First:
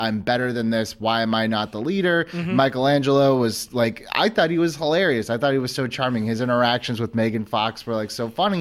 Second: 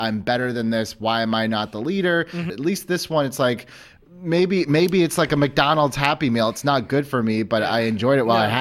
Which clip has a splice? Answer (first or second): second